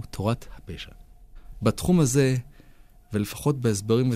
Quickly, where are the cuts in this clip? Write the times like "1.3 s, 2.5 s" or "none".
none